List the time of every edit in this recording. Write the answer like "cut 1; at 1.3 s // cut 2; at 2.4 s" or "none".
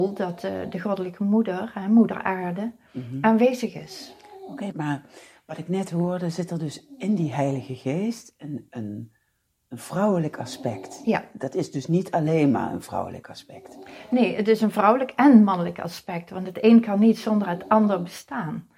cut 1; at 4.7 s